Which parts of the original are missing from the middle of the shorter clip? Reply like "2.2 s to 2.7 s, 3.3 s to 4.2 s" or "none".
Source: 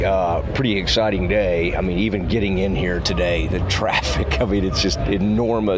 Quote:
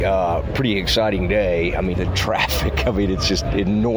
1.9 s to 3.5 s